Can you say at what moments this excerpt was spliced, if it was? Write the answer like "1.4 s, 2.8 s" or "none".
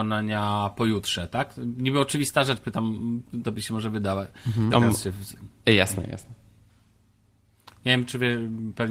4.7 s

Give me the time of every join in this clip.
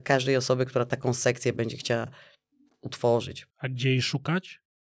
3.5 s

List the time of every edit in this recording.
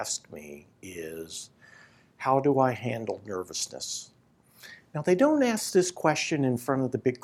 none

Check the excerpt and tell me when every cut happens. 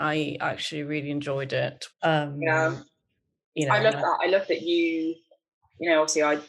1.9 s

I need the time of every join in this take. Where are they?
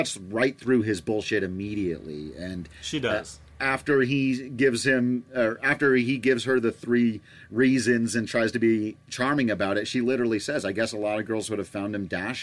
none

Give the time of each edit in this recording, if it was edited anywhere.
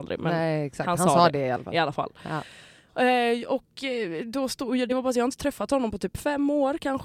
none

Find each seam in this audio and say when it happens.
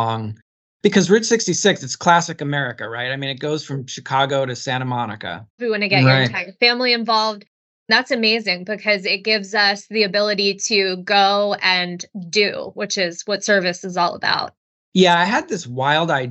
5.6 s

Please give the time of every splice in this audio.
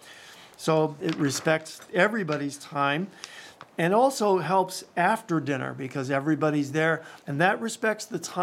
1.0 s, 7.2 s

